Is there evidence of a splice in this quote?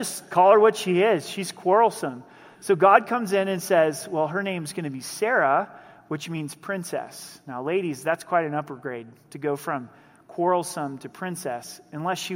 no; 0 cuts

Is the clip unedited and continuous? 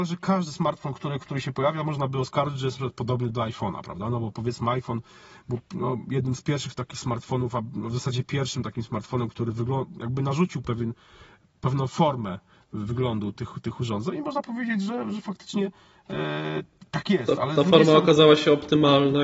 yes; 0 cuts

